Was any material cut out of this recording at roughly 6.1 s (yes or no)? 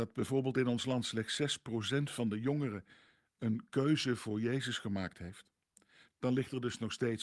yes